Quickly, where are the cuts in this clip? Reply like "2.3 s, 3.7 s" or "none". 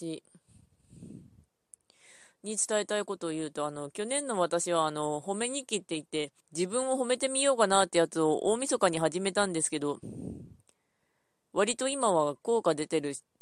3.2 s, 6.4 s